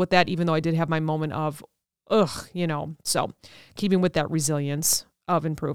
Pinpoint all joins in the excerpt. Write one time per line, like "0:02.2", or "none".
none